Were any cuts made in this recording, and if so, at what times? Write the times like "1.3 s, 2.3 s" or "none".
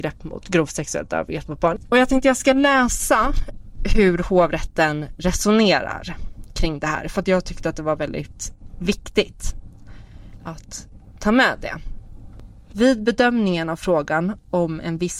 12.7 s

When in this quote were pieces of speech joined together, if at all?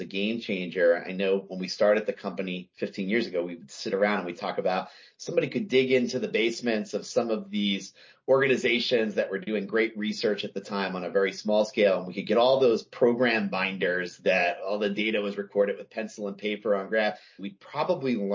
17.4 s

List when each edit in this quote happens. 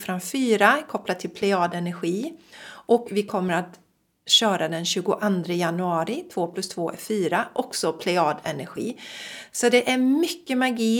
none

